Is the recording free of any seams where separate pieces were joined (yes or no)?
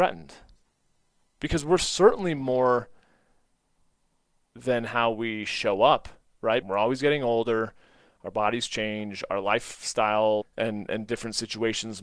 no